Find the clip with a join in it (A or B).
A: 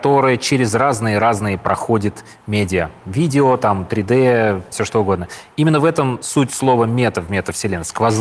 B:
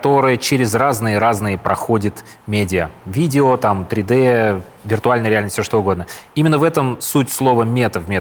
A